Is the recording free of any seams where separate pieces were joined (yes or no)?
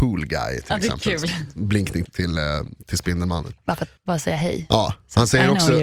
no